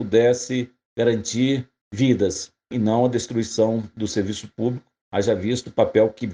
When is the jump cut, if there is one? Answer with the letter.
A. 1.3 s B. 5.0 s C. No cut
B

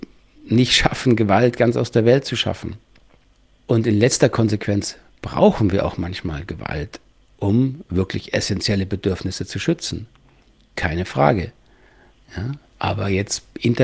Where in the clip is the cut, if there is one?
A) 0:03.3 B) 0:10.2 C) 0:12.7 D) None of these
C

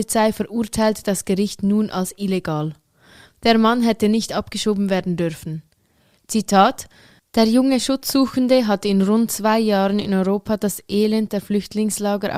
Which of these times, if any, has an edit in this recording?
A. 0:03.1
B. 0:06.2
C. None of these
B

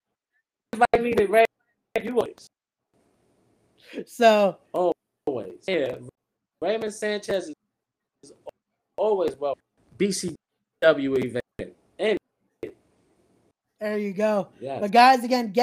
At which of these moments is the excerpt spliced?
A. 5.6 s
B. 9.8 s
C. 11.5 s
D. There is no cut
C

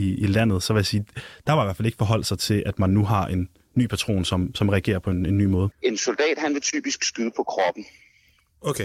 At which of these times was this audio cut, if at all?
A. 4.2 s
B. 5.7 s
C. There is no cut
B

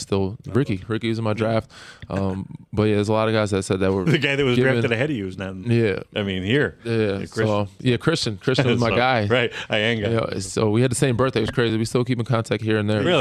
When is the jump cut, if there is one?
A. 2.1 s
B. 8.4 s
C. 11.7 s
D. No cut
D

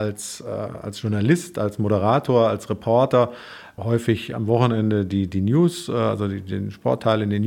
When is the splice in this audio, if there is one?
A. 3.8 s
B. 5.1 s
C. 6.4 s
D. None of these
A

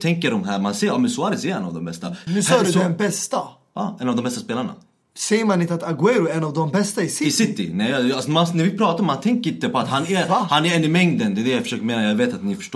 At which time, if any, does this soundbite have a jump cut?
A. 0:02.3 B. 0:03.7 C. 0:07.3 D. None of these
A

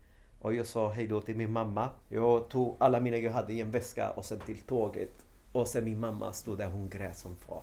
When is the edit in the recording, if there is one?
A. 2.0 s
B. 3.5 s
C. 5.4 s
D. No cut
A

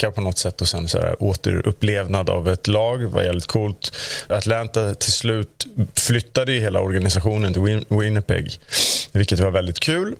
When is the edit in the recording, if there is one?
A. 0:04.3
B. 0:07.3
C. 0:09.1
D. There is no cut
A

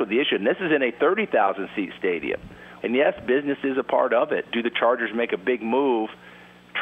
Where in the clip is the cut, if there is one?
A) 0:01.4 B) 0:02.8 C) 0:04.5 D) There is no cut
B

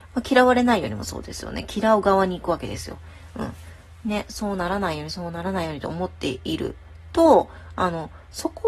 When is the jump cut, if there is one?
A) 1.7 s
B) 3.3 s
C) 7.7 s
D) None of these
D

